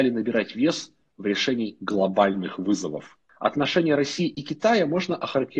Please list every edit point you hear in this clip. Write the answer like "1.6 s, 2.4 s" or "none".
none